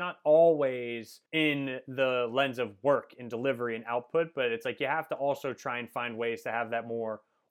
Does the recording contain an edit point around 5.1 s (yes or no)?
no